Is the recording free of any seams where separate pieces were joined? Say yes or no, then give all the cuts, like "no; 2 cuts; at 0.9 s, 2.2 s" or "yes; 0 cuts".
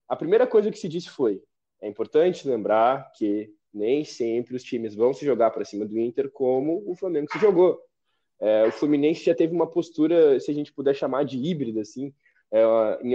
yes; 0 cuts